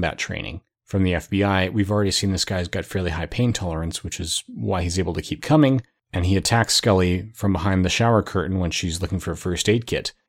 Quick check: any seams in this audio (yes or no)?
yes